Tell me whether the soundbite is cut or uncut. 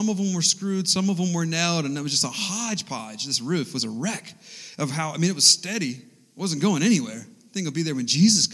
uncut